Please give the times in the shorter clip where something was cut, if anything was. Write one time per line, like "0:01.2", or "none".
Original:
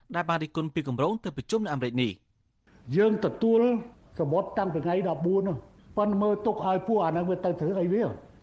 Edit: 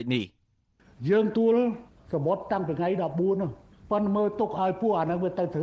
0:01.3